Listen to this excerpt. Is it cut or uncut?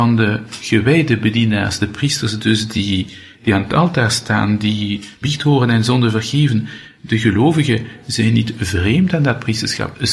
cut